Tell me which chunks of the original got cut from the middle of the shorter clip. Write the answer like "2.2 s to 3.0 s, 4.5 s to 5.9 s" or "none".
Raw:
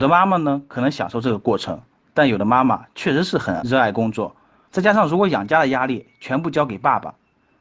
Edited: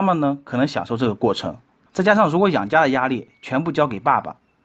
2.1 s to 4.6 s